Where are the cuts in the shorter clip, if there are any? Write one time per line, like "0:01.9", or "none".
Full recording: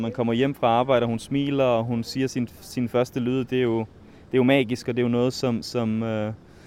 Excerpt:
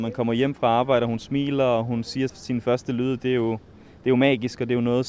0:02.3